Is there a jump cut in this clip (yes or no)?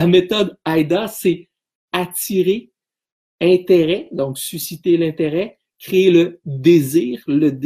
no